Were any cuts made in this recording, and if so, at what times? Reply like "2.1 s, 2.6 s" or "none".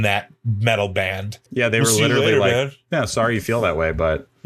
1.5 s